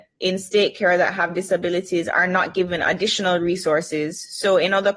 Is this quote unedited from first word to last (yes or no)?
yes